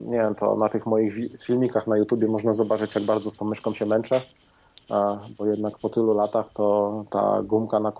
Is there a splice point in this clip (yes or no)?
no